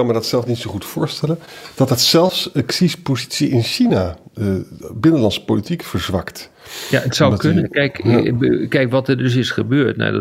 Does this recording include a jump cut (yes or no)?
no